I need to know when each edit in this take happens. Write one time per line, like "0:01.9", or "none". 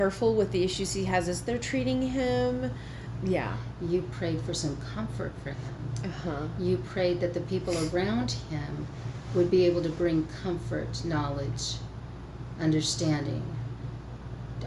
0:03.2

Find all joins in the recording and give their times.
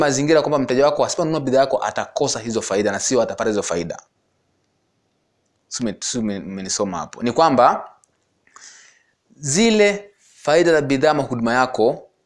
none

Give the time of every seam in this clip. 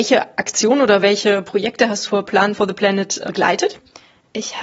0:02.1

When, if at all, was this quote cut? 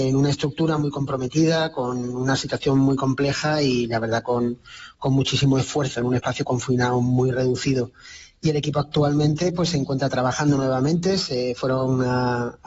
none

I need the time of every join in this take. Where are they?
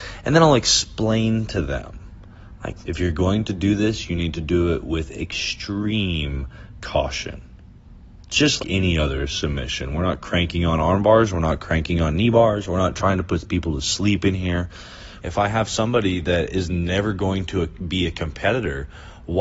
0:02.8
0:08.6
0:15.2

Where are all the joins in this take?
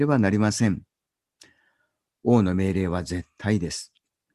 none

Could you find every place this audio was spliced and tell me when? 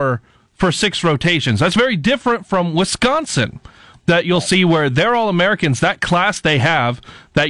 none

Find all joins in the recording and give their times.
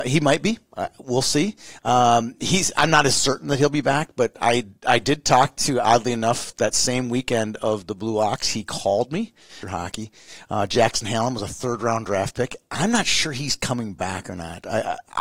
0:09.6

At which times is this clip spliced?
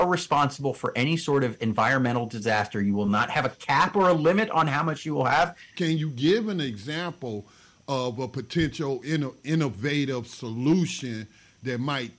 0:05.7

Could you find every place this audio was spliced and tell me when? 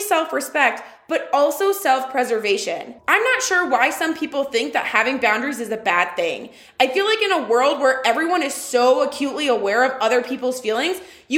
0:03.0

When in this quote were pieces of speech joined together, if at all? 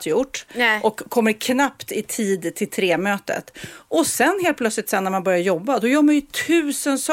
none

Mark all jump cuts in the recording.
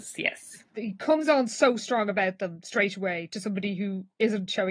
none

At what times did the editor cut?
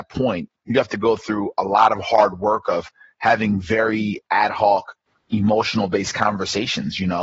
0:05.2

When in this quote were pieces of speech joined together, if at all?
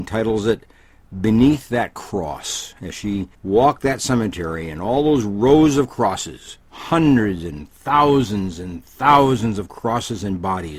0:03.3
0:06.6

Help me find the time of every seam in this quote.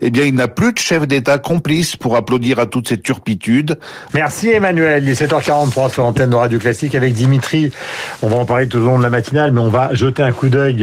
0:04.1

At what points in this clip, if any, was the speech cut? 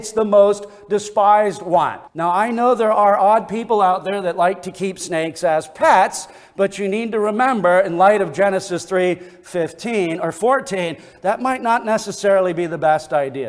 0:02.1

